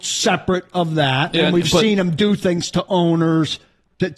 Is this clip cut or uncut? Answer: uncut